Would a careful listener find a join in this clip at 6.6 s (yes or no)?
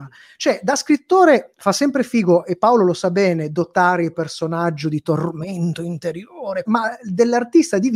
yes